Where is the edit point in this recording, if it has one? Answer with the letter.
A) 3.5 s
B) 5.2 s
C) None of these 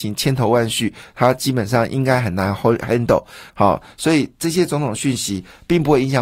A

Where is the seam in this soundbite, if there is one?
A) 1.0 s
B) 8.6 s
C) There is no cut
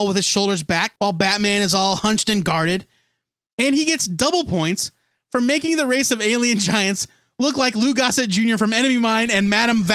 A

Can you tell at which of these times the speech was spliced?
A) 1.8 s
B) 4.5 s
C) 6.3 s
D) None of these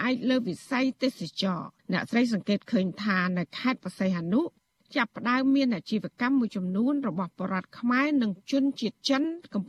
A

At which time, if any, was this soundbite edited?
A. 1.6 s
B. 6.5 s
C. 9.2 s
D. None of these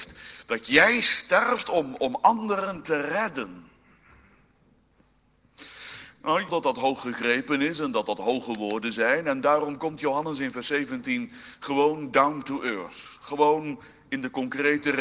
B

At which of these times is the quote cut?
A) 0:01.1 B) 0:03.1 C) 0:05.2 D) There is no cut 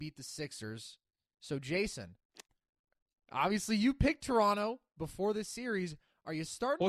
D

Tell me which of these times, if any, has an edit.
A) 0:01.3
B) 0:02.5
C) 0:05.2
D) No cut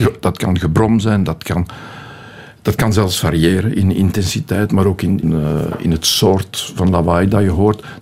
C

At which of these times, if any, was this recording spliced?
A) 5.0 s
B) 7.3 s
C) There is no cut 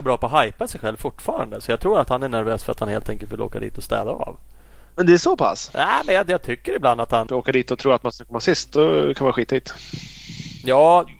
B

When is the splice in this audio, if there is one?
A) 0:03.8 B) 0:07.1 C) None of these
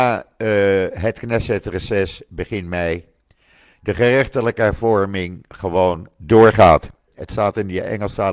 B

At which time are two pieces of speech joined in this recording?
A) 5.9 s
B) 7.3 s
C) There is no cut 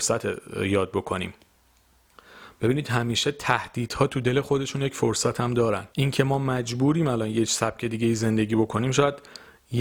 A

